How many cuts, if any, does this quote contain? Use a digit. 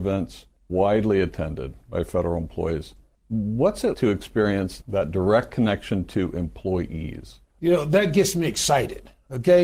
2